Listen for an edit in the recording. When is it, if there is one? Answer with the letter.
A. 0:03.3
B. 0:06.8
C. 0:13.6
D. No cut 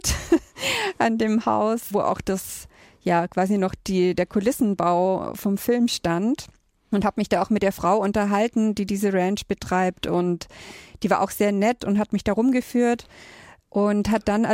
D